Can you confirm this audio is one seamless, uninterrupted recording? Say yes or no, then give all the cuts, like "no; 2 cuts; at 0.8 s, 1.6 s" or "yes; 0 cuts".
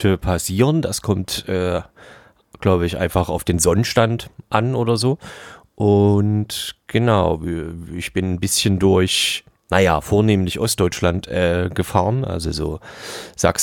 yes; 0 cuts